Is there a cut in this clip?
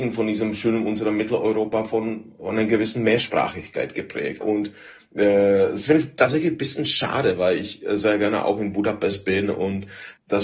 yes; 1 cut; at 4.4 s

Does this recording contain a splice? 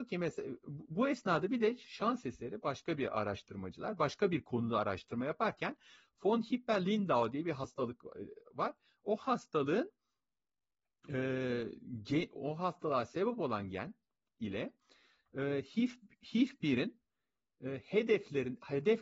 no; 0 cuts

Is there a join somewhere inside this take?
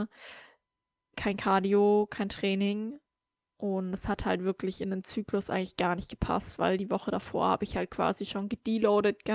no; 0 cuts

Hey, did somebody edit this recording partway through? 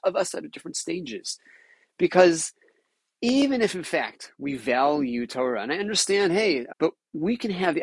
yes; 1 cut; at 6.7 s

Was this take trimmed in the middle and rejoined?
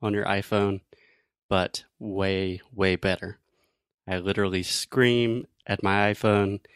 yes; 1 cut; at 4.0 s

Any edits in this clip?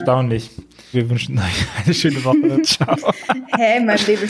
yes; 2 cuts; at 0.9 s, 2.6 s

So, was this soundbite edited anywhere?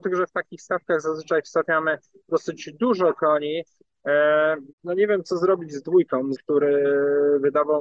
yes; 2 cuts; at 4.7 s, 6.3 s

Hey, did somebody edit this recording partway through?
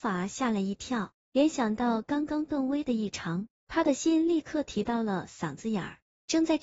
no; 0 cuts

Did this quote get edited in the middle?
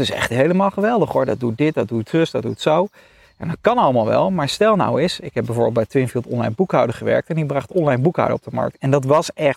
no; 0 cuts

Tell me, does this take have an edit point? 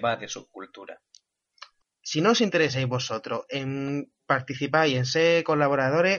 yes; 2 cuts; at 1.8 s, 4.2 s

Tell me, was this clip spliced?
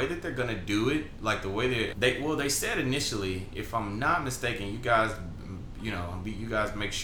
yes; 1 cut; at 1.9 s

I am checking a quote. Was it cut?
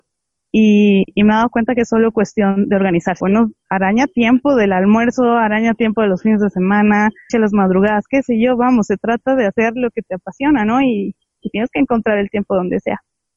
yes; 2 cuts; at 3.2 s, 7.3 s

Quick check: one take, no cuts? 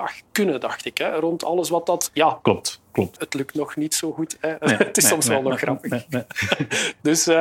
no; 1 cut; at 3.2 s

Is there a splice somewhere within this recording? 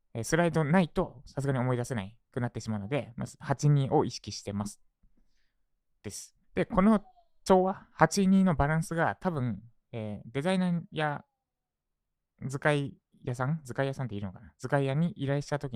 yes; 1 cut; at 6.4 s

